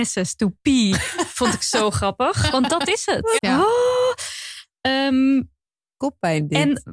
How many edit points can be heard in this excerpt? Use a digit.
1